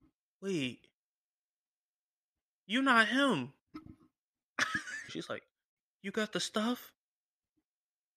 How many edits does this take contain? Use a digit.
1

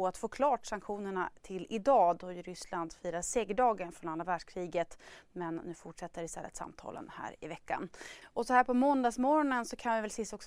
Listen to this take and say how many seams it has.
1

